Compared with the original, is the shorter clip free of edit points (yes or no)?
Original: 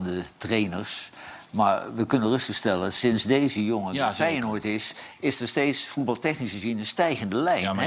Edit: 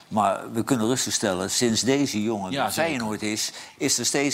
yes